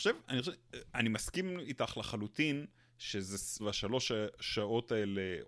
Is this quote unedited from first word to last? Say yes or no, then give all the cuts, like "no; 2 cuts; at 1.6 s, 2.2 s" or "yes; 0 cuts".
no; 1 cut; at 3.6 s